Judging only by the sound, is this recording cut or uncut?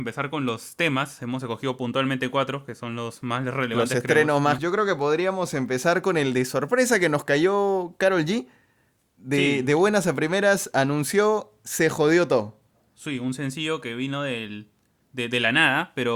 cut